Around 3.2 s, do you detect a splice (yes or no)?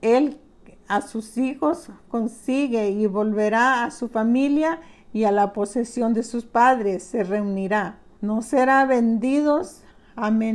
no